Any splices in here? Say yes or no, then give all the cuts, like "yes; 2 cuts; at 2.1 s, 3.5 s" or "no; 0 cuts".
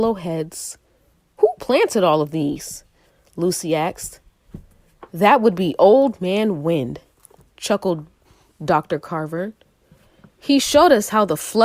no; 0 cuts